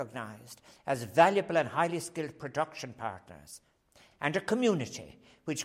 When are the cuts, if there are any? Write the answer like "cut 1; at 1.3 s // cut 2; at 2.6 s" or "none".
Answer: cut 1; at 4.1 s